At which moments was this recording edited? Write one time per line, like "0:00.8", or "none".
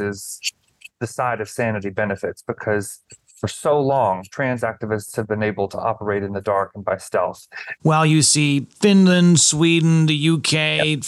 0:07.8